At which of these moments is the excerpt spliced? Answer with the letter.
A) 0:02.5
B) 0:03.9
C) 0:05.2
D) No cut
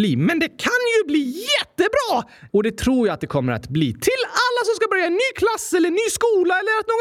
A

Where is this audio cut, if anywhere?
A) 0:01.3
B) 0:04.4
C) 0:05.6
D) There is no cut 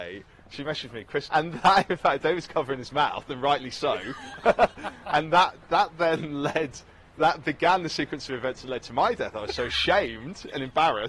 A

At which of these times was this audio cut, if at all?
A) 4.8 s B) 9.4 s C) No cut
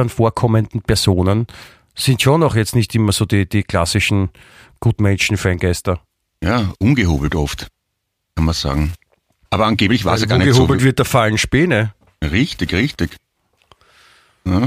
B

